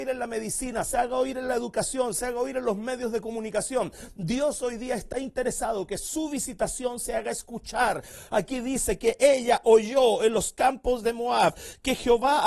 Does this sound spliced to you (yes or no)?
no